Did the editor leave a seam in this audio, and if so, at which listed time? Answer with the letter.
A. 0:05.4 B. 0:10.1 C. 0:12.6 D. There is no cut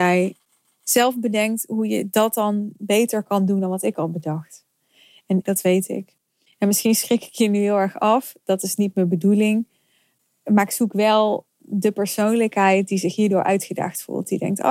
A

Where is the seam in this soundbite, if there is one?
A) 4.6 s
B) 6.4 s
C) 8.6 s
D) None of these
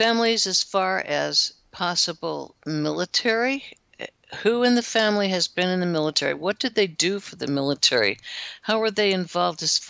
D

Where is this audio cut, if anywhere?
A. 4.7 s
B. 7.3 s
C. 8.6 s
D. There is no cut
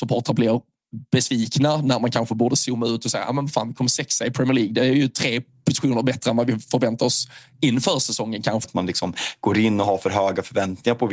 C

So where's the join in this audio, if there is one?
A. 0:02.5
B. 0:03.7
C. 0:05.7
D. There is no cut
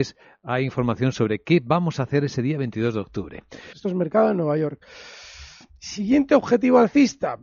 B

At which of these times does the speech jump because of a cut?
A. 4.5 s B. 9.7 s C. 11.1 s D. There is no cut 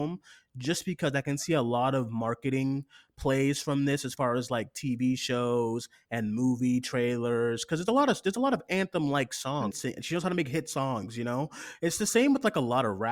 B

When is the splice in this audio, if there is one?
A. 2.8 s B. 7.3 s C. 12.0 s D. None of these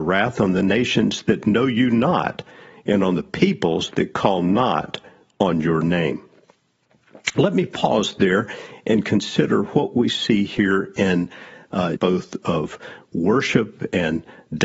C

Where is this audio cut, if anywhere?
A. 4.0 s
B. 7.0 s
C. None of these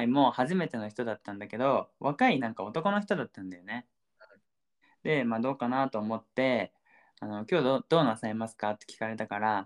C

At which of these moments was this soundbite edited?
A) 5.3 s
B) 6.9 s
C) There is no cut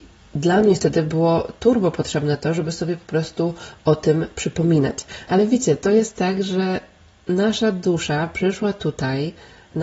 A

